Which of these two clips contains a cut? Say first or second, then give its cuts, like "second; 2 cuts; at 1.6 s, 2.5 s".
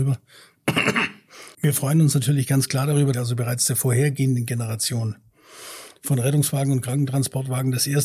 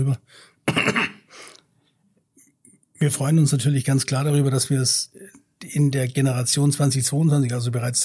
first; 2 cuts; at 1.5 s, 3.1 s